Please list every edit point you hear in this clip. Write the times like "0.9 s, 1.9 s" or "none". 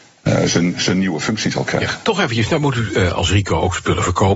2.0 s